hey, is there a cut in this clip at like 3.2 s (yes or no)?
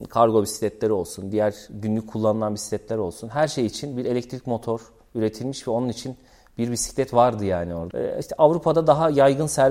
no